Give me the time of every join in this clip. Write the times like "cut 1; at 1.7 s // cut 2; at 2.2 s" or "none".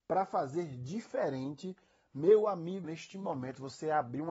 cut 1; at 2.8 s